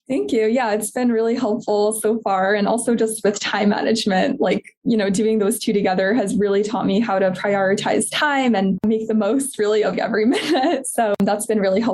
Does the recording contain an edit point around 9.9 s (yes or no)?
yes